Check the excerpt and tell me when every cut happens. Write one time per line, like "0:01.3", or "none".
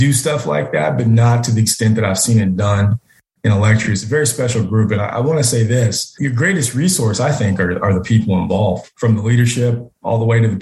none